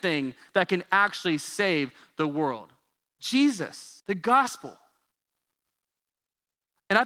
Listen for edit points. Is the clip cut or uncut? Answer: cut